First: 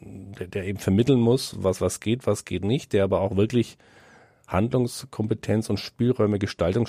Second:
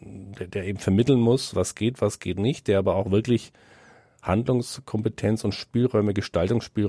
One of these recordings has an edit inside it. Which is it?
second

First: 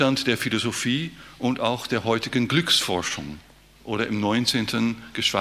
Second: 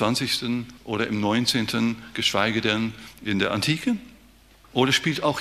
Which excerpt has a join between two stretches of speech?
first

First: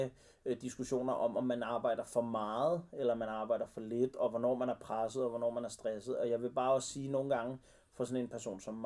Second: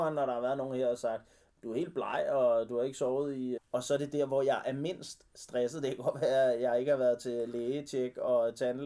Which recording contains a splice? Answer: second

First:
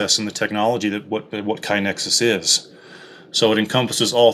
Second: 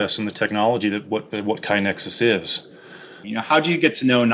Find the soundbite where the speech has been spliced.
second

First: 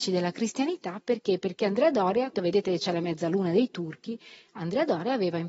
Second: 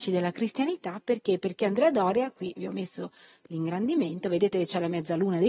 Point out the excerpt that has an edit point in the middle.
first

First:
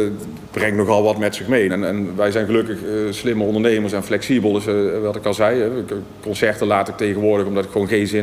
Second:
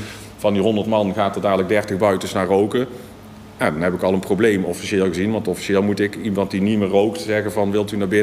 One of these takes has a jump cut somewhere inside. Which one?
first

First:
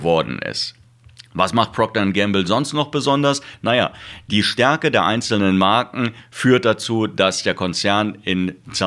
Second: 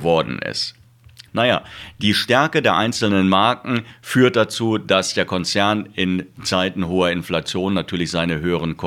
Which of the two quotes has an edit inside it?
second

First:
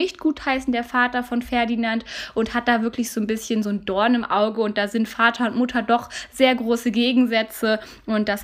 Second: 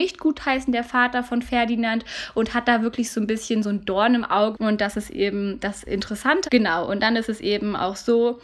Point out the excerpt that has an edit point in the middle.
second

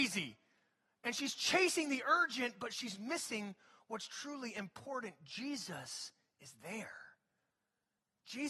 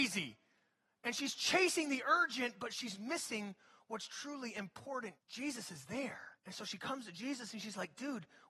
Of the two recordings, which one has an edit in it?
second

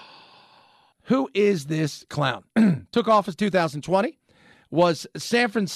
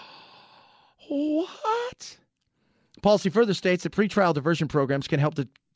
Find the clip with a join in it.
first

